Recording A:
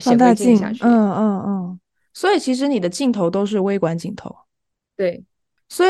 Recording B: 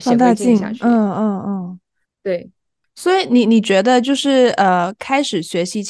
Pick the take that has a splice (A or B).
B